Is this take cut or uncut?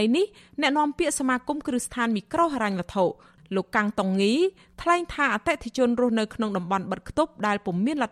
uncut